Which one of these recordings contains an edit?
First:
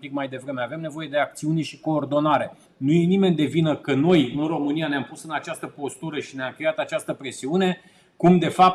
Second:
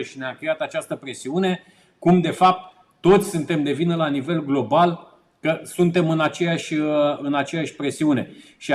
first; 1 cut; at 2.7 s

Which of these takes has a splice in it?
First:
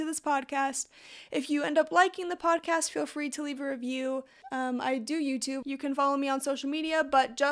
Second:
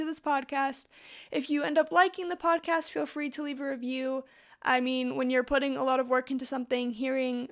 first; 2 cuts; at 4.4 s, 5.6 s

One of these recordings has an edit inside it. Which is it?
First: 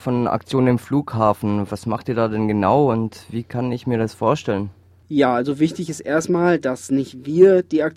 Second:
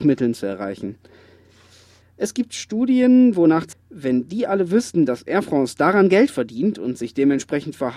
second; 2 cuts; at 2.0 s, 3.7 s

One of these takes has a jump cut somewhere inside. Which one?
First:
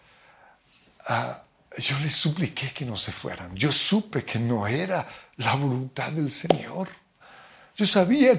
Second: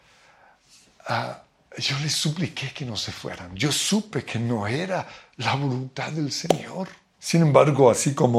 second; 1 cut; at 7.1 s

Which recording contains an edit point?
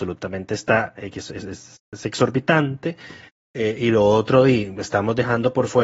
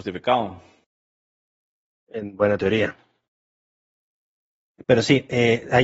second; 1 cut; at 1.9 s

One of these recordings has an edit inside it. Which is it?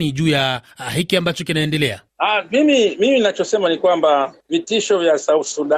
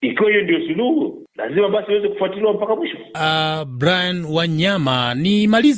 second; 1 cut; at 3.1 s

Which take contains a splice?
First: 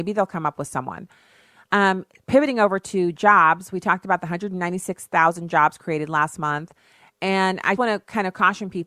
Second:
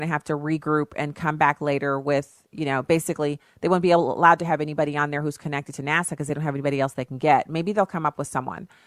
first; 1 cut; at 7.8 s

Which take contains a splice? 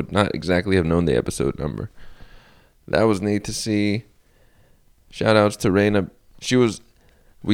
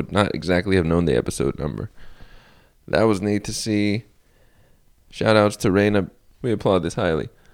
second; 1 cut; at 6.3 s

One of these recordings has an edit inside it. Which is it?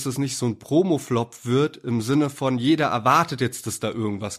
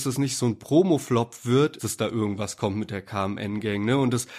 second; 1 cut; at 1.8 s

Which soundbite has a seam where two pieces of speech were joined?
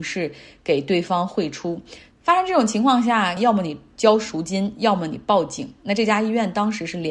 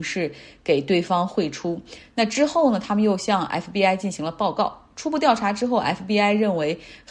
first; 2 cuts; at 2.1 s, 3.4 s

